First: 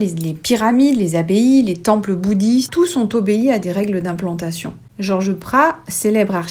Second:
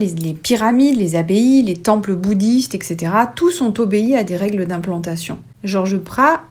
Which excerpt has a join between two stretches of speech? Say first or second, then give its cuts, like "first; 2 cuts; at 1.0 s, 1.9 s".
first; 1 cut; at 2.7 s